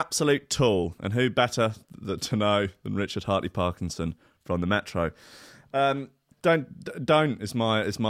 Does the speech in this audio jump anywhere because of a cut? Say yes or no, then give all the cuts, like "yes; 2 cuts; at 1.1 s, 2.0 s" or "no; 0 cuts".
yes; 1 cut; at 6.3 s